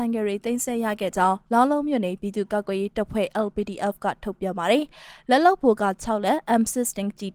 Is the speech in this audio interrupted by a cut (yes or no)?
no